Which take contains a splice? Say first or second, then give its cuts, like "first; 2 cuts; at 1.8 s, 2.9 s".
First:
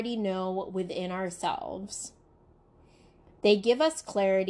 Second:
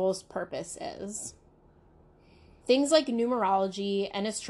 second; 1 cut; at 2.6 s